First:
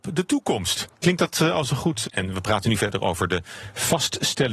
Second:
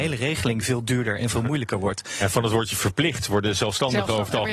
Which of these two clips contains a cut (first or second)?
first